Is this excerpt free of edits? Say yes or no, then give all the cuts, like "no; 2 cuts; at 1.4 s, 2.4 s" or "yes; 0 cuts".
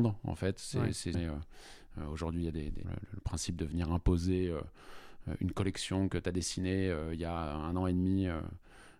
no; 2 cuts; at 1.1 s, 2.8 s